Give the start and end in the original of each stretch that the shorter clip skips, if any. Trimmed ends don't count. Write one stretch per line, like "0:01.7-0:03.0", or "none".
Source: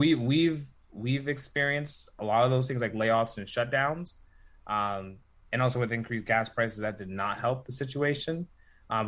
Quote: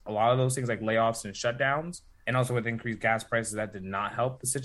0:04.4-0:05.5